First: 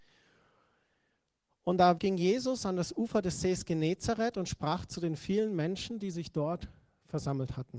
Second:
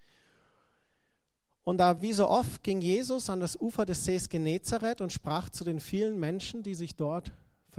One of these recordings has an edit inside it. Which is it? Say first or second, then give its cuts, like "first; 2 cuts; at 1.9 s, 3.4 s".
first; 1 cut; at 2.0 s